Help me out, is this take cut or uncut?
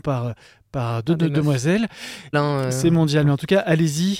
cut